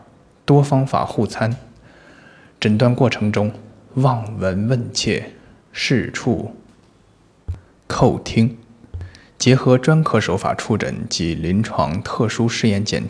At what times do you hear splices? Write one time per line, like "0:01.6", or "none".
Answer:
none